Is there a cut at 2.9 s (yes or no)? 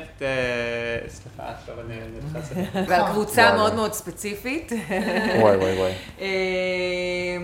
yes